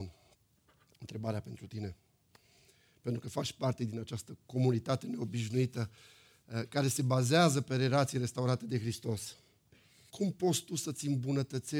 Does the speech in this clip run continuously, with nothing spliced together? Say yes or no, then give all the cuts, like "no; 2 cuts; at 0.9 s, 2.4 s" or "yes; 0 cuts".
no; 1 cut; at 10.1 s